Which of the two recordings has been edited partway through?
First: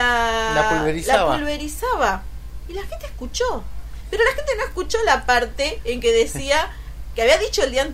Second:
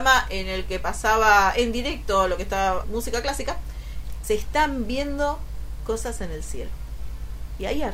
second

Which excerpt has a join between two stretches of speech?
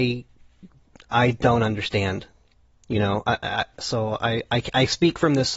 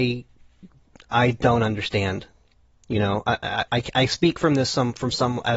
second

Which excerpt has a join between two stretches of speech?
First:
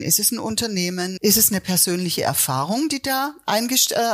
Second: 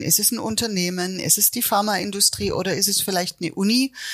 first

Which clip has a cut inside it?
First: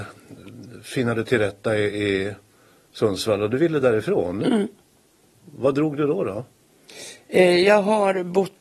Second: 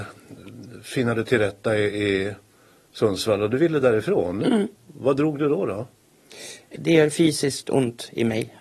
second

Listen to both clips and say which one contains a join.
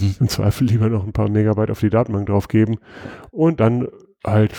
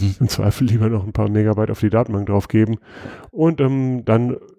first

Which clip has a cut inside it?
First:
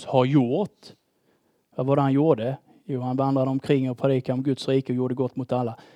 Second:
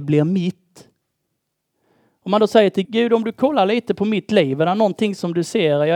second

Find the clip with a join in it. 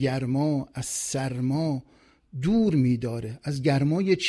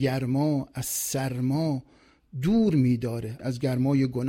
second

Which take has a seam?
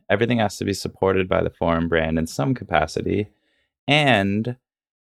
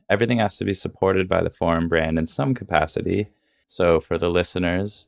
second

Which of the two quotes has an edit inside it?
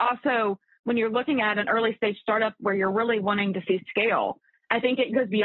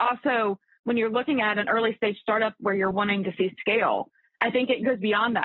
second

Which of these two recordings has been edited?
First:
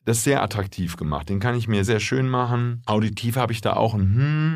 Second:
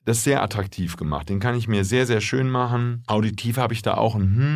first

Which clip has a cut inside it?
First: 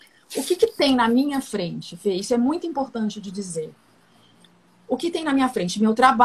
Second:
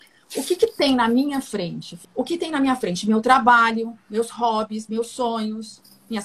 second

